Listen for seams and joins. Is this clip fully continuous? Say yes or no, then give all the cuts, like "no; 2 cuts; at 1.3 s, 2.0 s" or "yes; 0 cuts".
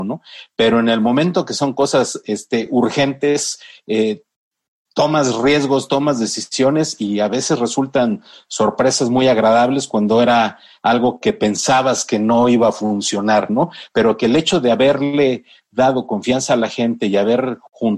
yes; 0 cuts